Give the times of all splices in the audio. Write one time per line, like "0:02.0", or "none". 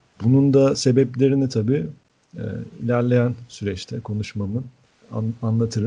none